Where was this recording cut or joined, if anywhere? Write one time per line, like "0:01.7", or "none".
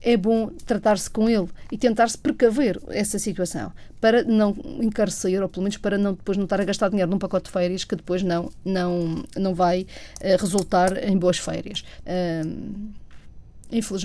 0:12.0